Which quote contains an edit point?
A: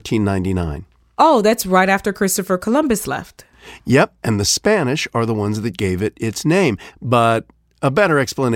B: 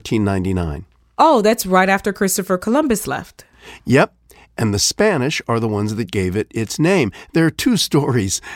A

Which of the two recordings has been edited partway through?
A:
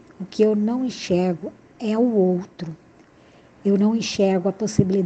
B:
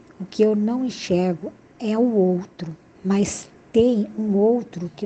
B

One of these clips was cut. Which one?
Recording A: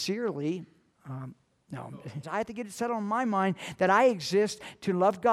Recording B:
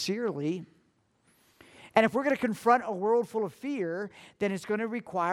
A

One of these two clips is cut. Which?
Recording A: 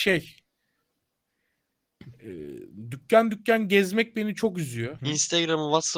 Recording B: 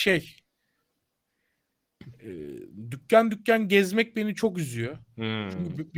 A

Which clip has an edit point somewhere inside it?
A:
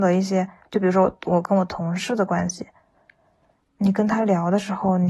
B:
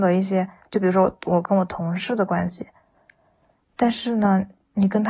A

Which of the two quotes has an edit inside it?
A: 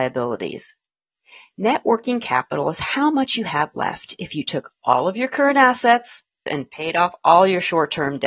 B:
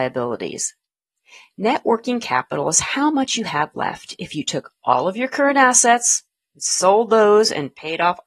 A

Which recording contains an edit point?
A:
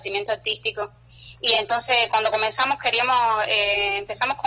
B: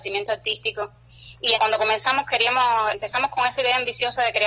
B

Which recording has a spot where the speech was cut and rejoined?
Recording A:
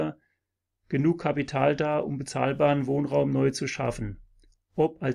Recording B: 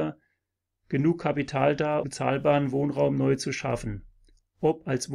B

